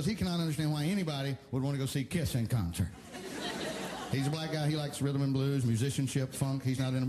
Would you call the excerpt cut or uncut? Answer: uncut